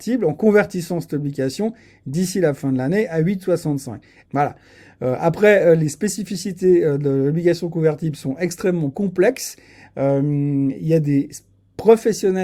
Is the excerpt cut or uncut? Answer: cut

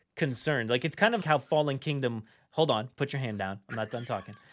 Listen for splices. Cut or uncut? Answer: cut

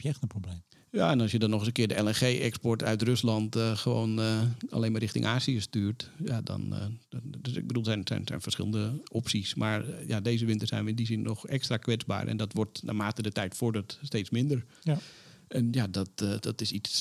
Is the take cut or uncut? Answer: uncut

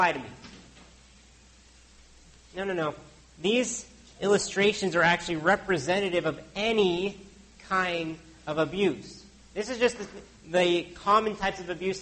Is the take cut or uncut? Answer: uncut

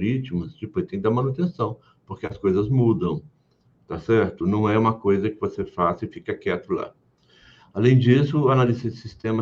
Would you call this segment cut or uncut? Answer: uncut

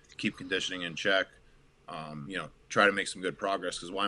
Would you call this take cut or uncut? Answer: uncut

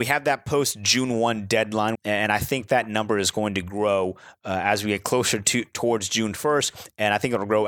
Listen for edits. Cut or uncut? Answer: cut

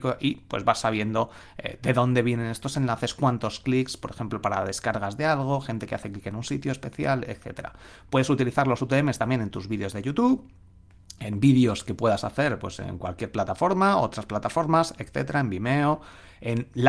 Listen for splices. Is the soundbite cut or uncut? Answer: uncut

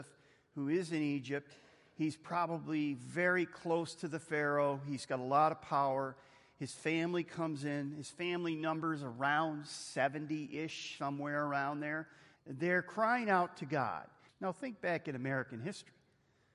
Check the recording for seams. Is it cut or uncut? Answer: cut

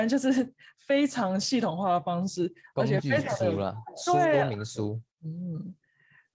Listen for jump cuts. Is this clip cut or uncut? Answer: cut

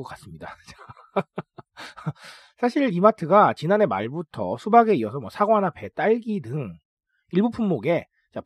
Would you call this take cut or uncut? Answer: uncut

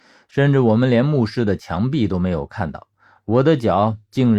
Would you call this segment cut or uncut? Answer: cut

